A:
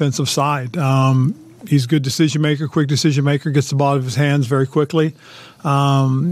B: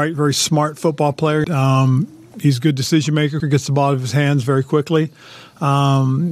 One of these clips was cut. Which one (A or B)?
B